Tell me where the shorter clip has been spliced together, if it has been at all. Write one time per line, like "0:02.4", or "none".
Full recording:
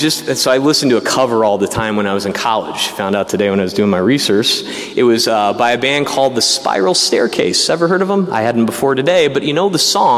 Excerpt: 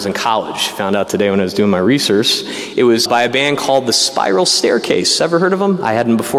0:03.1